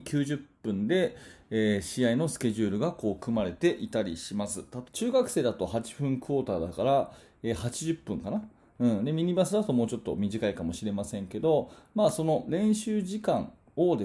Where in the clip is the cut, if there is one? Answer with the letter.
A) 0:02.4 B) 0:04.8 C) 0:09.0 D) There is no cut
B